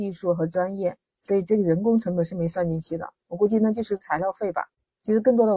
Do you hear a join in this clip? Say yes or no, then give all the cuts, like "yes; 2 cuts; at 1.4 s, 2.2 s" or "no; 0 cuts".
no; 0 cuts